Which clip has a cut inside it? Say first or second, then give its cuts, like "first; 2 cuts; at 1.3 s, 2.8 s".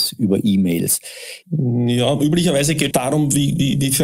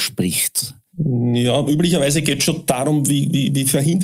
first; 2 cuts; at 1.4 s, 2.9 s